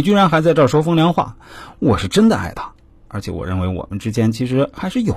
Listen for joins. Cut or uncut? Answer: uncut